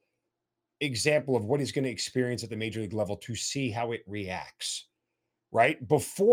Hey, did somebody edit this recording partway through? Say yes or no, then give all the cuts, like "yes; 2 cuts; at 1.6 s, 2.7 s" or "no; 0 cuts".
no; 0 cuts